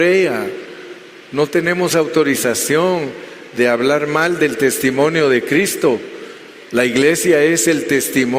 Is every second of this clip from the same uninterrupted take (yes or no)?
yes